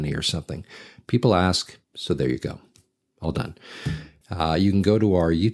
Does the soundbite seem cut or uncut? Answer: cut